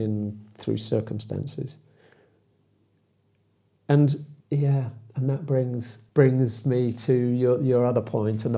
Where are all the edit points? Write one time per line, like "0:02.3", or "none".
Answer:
0:04.4
0:06.1